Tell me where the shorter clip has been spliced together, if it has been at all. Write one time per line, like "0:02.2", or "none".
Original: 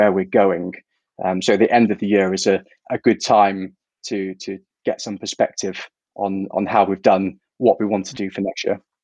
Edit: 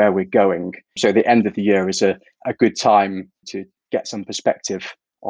0:01.0
0:03.4